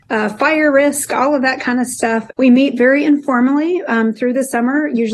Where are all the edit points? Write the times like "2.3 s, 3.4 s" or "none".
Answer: 2.3 s